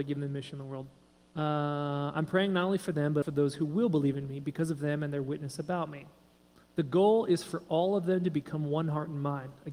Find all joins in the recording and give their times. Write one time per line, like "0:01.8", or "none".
0:03.2